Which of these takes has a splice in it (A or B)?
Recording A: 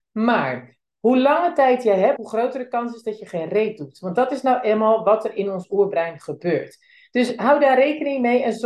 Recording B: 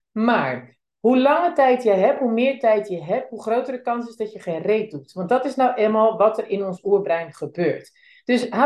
A